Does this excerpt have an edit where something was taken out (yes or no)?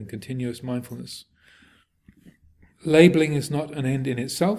no